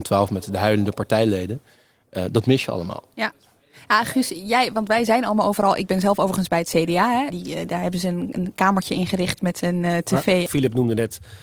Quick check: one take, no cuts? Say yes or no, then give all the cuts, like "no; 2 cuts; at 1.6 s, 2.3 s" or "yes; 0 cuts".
no; 2 cuts; at 7.3 s, 10.5 s